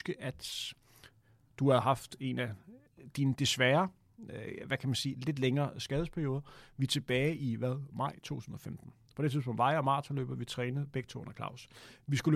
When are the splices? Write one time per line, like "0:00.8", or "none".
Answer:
none